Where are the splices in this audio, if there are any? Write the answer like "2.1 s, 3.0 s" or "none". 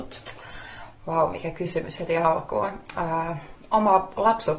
none